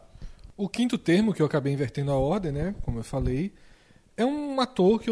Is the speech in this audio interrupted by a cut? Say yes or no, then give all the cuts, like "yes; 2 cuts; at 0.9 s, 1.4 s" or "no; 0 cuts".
no; 0 cuts